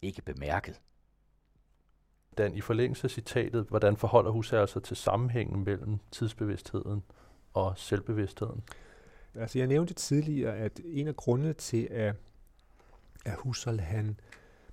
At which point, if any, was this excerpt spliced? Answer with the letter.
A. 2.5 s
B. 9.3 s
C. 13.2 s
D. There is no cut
B